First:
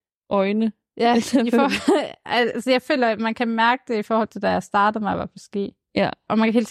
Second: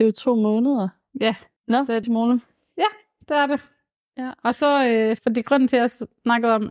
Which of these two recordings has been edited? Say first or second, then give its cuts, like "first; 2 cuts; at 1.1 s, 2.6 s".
second; 3 cuts; at 1.0 s, 2.0 s, 5.2 s